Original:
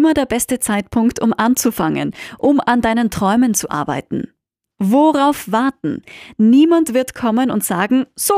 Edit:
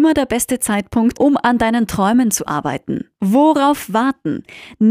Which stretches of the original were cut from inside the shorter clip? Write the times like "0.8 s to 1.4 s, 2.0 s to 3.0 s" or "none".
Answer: 1.1 s to 2.4 s, 4.4 s to 4.7 s